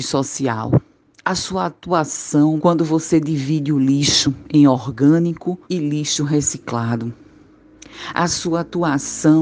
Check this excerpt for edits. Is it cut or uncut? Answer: cut